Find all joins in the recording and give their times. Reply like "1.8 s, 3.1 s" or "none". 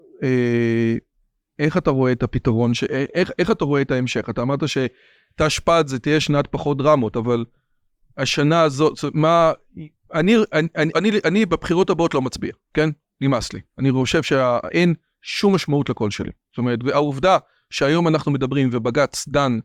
10.9 s